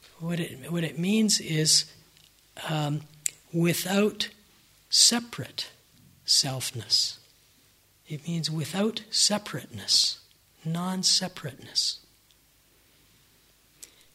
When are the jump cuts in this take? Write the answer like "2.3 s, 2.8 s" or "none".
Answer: none